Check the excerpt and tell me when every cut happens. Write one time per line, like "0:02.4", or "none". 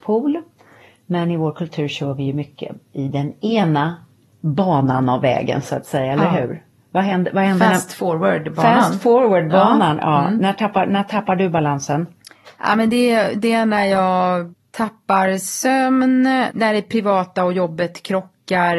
none